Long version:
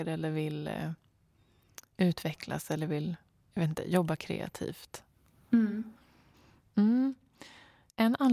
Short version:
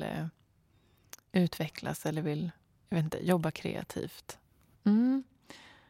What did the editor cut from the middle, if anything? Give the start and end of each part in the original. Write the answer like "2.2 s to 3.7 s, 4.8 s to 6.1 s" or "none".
5.4 s to 6.6 s